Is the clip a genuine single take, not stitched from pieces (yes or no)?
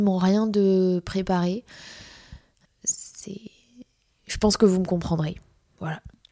no